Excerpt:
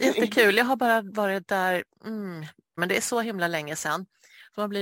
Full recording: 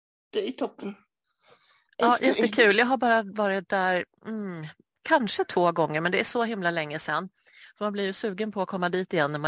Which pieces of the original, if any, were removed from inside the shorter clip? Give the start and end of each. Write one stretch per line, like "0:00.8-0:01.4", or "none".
0:05.0-0:06.0